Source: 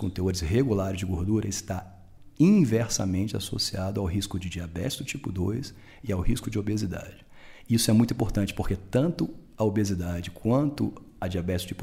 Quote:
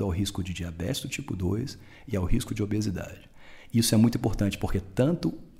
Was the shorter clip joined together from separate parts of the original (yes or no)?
no